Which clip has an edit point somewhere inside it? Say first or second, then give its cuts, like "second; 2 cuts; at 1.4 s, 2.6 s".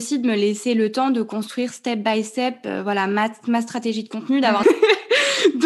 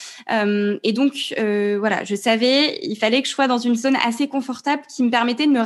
first; 1 cut; at 4.6 s